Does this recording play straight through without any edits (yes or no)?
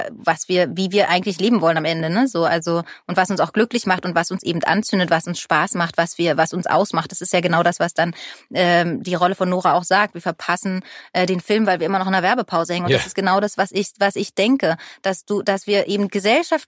yes